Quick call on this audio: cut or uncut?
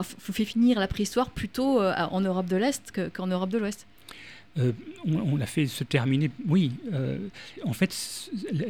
cut